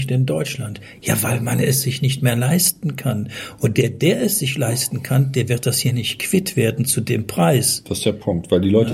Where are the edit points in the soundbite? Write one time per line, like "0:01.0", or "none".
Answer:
none